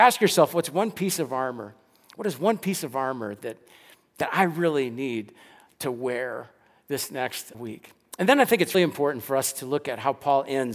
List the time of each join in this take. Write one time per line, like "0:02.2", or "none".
0:07.5
0:08.7

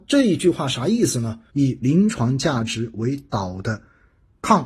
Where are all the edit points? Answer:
0:01.5

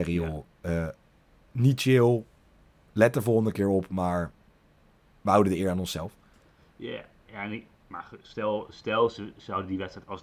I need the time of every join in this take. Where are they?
none

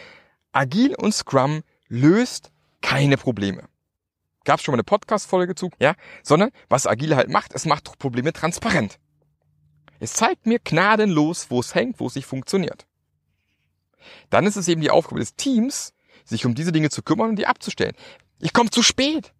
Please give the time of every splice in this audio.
0:05.7
0:12.0
0:18.2

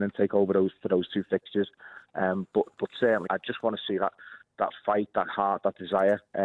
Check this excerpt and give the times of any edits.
0:03.3

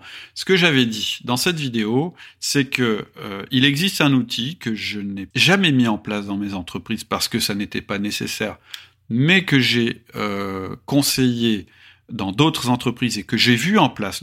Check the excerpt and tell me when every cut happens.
0:05.3

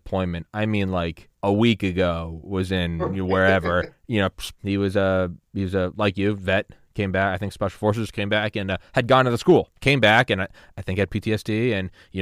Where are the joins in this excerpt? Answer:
0:01.3
0:04.6
0:09.7

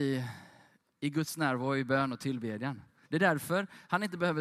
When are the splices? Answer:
0:03.0

